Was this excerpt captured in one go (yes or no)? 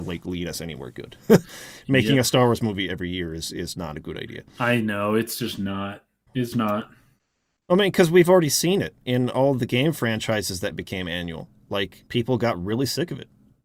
no